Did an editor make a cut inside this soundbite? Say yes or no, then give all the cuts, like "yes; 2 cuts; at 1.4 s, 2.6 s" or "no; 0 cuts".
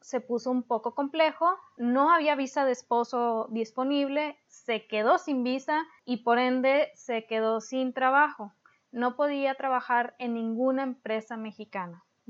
no; 0 cuts